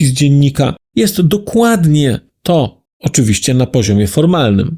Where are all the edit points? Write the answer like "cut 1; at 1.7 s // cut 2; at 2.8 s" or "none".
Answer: cut 1; at 2.9 s